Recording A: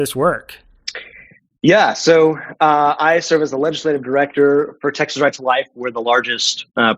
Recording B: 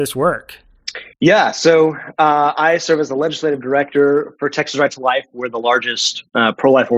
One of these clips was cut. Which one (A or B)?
B